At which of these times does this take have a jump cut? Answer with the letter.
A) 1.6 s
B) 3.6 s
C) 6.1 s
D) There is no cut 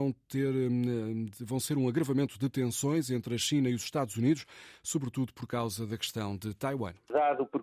D